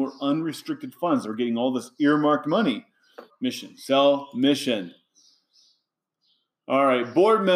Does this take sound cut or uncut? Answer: cut